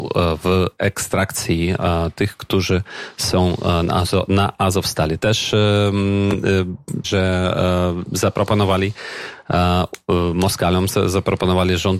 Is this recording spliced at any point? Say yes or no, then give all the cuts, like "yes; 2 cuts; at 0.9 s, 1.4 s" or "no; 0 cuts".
yes; 1 cut; at 7.0 s